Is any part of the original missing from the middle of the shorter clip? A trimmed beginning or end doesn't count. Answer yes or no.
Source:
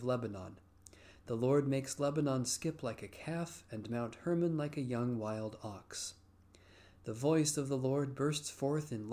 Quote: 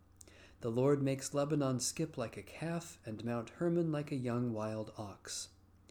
no